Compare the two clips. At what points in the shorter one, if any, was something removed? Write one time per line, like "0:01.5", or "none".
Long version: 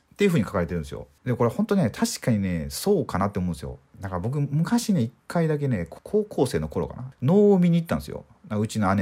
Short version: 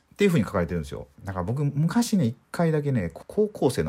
0:01.1